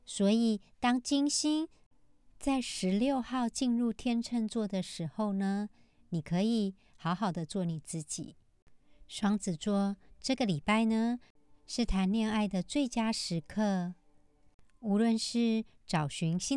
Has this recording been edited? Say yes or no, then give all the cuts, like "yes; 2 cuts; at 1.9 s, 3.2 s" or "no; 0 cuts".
no; 0 cuts